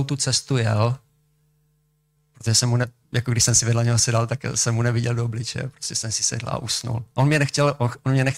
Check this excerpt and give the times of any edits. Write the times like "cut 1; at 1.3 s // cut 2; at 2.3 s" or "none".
cut 1; at 2.2 s